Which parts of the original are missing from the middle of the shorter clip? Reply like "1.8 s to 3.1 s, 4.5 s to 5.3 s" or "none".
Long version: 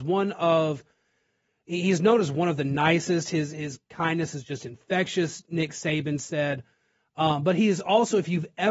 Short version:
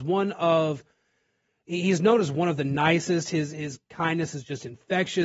none